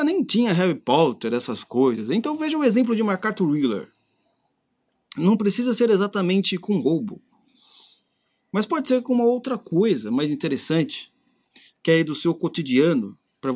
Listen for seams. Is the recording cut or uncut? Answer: uncut